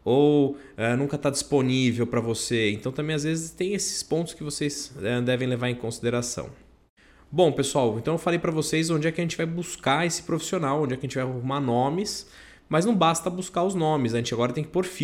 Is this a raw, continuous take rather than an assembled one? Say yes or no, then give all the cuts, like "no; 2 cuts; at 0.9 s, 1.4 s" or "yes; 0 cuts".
yes; 0 cuts